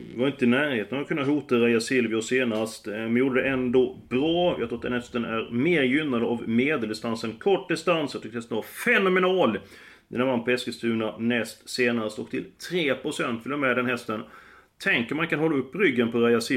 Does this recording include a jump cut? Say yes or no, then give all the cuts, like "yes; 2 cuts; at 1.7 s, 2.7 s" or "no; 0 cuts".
no; 0 cuts